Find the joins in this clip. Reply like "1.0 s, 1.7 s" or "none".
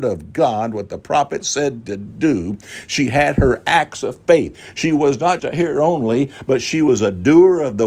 5.4 s